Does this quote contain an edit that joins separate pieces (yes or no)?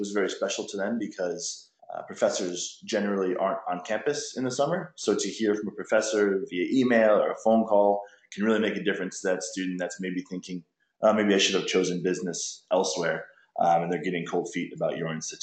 yes